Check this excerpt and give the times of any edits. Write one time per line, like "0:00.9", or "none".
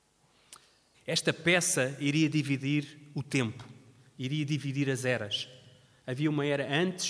0:00.9

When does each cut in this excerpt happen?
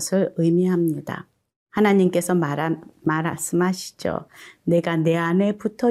none

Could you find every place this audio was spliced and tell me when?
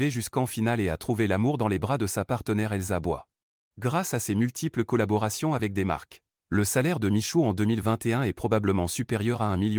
0:03.7

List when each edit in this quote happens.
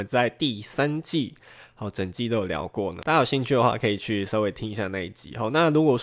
none

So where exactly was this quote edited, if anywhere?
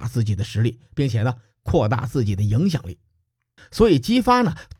0:03.6

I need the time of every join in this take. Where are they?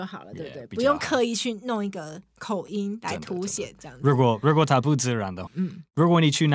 0:05.5

